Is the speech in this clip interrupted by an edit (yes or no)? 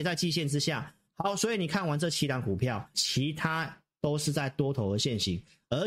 yes